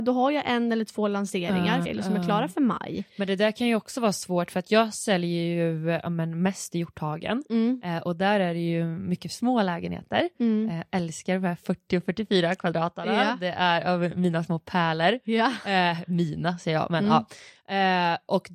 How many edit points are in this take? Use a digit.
1